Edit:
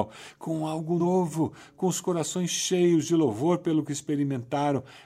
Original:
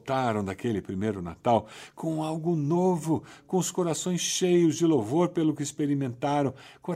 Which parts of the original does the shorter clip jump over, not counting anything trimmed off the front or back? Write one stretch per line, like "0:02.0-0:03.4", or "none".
0:02.6-0:02.7